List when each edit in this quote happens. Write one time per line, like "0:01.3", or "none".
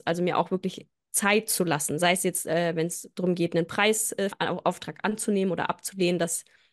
0:04.3